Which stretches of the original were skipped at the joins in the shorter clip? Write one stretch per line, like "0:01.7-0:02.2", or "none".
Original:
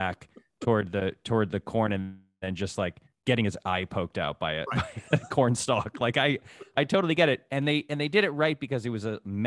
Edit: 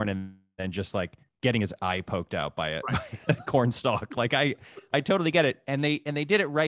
none